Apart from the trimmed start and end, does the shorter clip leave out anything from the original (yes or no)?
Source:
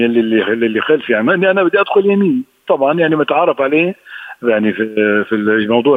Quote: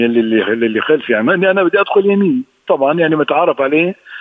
no